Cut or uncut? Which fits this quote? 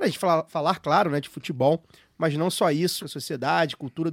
cut